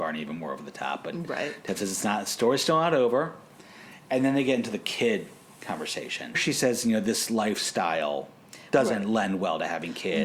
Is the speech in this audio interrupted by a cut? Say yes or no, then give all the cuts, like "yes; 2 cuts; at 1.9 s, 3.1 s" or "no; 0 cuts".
yes; 1 cut; at 6.3 s